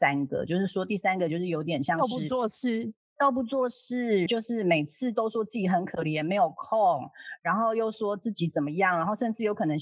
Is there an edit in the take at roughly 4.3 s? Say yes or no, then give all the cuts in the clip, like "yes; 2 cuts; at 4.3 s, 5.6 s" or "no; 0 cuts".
yes; 1 cut; at 4.3 s